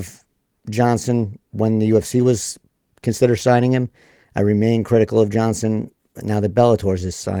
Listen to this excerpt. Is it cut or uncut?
uncut